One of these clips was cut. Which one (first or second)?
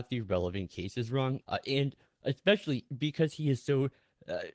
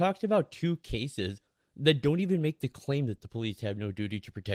first